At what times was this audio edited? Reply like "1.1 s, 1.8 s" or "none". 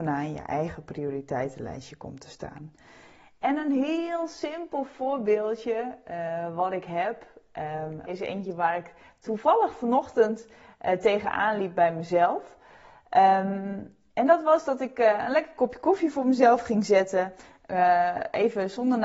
8.1 s

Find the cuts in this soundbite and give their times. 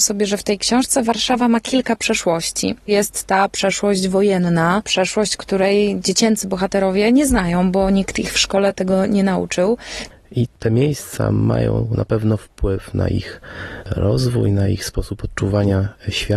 10.1 s

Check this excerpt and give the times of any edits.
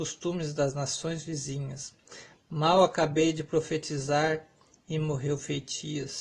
none

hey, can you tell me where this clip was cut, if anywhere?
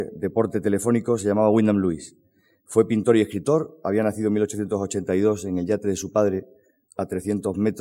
none

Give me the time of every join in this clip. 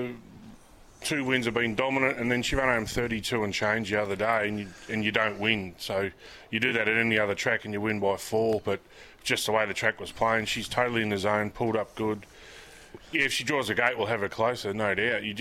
none

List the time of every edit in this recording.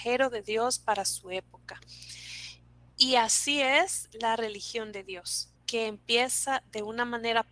2.9 s, 5.6 s

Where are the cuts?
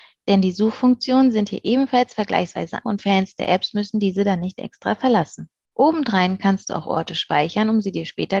2.8 s, 5.7 s

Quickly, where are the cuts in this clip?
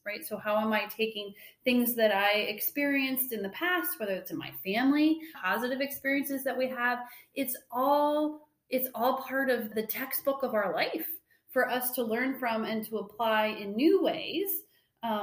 5.3 s, 9.7 s

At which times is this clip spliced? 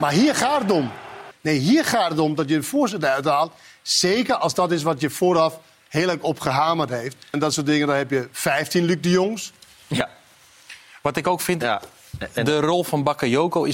1.3 s, 7.3 s

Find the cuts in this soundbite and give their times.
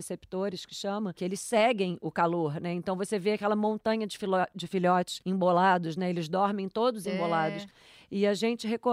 none

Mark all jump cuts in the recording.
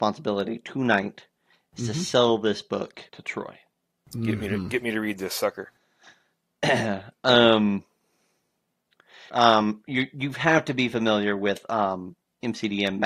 3.1 s, 9.3 s

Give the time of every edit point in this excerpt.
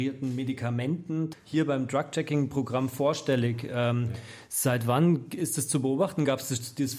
1.3 s

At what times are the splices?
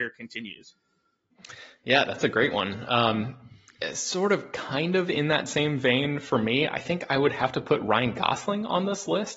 none

